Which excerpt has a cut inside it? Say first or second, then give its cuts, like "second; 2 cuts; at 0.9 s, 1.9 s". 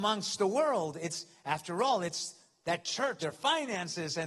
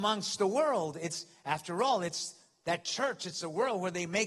first; 1 cut; at 3.2 s